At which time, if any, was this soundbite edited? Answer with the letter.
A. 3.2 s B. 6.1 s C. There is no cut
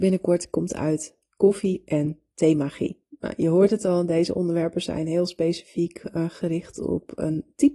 C